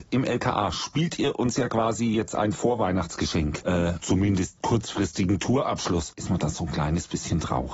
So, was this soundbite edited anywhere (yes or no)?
yes